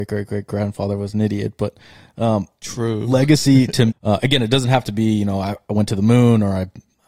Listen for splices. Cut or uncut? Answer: cut